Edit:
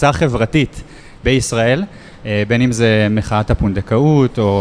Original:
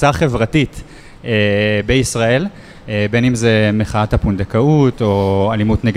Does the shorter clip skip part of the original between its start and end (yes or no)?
yes